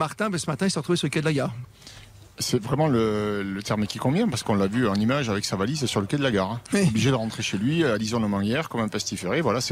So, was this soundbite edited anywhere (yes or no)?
no